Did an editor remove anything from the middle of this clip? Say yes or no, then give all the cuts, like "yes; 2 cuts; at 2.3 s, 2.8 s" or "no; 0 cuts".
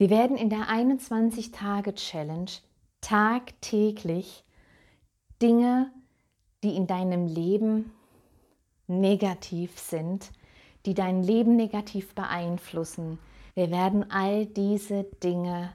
yes; 1 cut; at 13.5 s